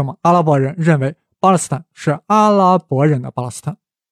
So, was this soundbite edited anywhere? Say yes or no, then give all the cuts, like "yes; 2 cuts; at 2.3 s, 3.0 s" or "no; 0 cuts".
no; 0 cuts